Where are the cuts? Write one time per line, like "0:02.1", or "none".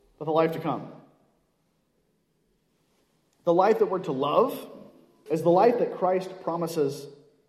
0:05.3